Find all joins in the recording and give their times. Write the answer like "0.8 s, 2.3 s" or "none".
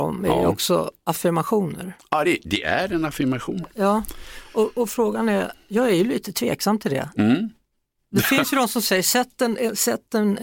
none